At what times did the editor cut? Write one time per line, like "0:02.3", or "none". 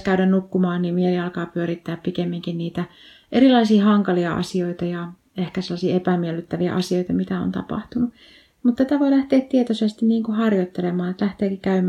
none